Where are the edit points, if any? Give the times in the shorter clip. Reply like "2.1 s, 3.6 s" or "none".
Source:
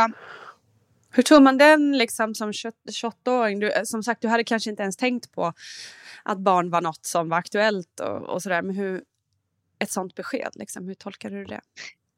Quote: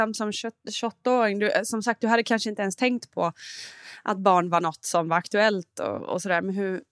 none